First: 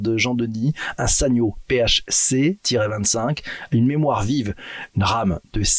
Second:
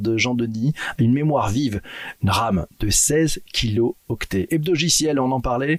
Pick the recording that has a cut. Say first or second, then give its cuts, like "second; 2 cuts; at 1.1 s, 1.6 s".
second; 2 cuts; at 1.0 s, 4.5 s